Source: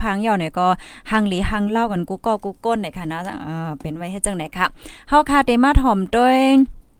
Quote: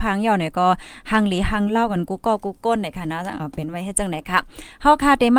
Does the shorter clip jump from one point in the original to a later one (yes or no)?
yes